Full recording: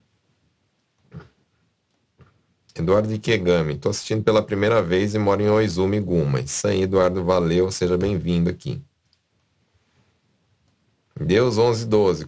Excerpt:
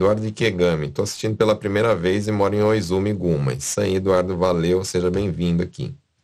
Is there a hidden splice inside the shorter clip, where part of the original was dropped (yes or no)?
no